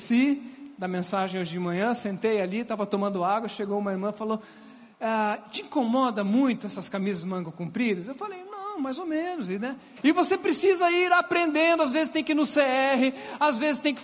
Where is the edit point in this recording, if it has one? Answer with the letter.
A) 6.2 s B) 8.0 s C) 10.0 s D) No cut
C